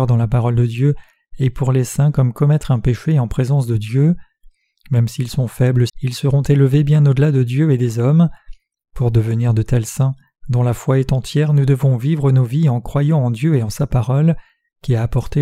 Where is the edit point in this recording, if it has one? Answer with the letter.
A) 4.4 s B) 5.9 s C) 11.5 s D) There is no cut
B